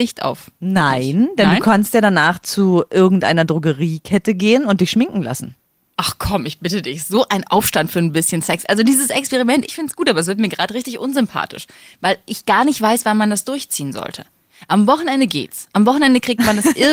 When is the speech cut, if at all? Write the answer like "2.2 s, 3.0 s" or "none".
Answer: 9.7 s

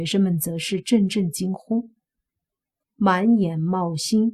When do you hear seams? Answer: 2.8 s

